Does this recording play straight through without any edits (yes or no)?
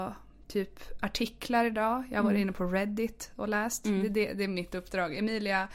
yes